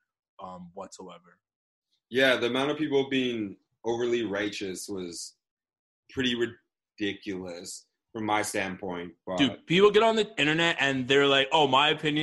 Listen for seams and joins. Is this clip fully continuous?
yes; 0 cuts

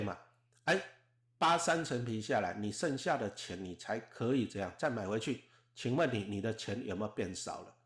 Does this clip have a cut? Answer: no; 0 cuts

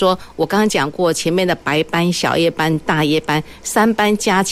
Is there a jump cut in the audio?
no; 0 cuts

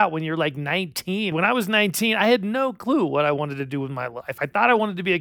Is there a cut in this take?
yes; 1 cut; at 1.3 s

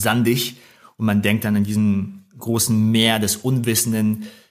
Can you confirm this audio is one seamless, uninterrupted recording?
yes; 0 cuts

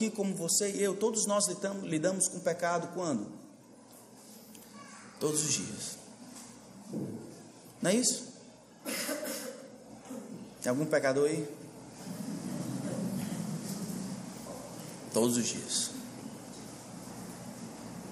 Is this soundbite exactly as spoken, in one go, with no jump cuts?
yes; 0 cuts

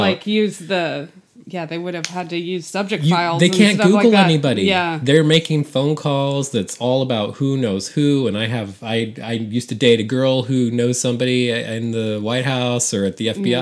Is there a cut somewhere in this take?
no; 0 cuts

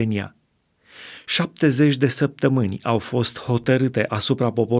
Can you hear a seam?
no; 0 cuts

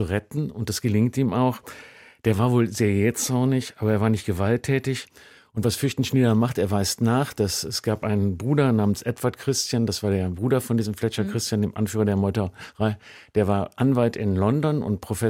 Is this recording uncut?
yes; 0 cuts

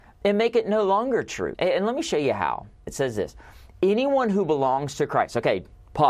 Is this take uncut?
no; 2 cuts; at 1.5 s, 2.9 s

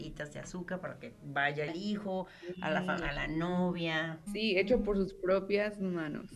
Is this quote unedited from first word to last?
no; 2 cuts; at 1.7 s, 4.3 s

